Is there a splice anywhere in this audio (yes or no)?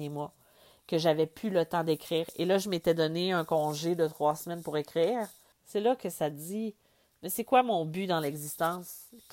yes